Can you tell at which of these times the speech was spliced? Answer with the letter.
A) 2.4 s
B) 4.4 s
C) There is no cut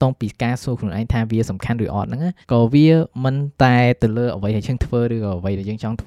A